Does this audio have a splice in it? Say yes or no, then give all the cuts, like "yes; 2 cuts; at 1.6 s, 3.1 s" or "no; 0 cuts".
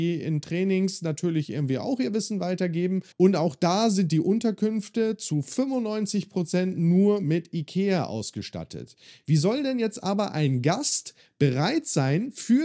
yes; 1 cut; at 3.1 s